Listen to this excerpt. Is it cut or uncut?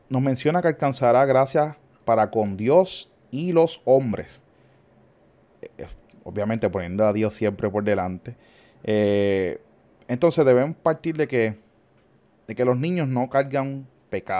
uncut